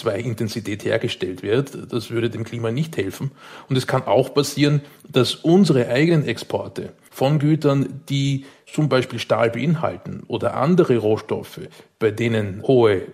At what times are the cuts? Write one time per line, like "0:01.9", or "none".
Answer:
none